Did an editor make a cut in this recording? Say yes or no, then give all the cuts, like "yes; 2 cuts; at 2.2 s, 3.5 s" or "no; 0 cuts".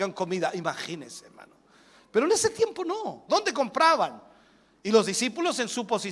yes; 1 cut; at 3.3 s